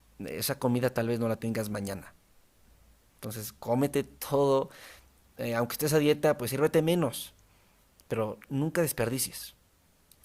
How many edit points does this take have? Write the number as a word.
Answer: zero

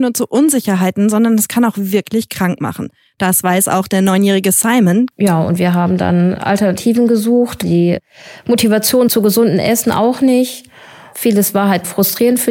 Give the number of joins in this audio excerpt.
three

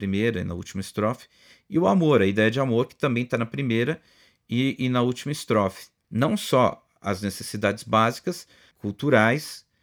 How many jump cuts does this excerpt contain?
two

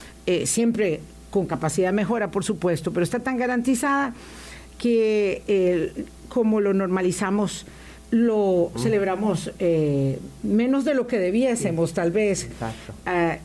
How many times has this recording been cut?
zero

